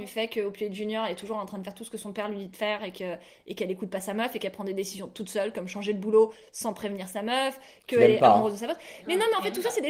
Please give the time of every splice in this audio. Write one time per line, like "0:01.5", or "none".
none